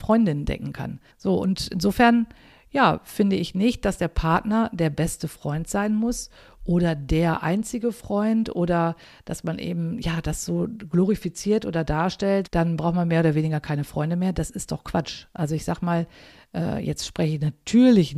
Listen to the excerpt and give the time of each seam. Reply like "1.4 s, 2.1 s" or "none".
1.1 s, 12.5 s